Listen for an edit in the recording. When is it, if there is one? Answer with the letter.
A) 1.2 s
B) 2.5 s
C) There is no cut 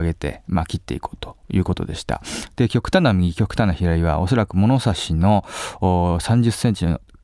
B